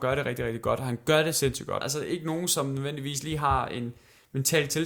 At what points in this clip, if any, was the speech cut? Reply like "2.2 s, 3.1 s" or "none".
1.8 s